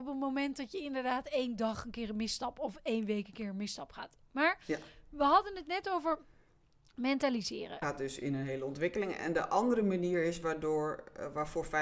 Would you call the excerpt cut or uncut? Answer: cut